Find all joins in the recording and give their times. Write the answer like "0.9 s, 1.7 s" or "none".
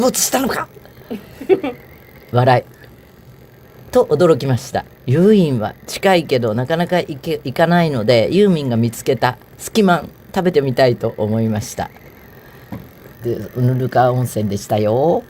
4.9 s, 13.1 s